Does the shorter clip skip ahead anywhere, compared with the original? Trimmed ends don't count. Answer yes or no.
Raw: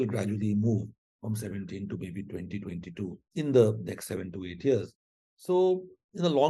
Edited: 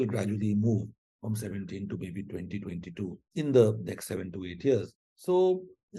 yes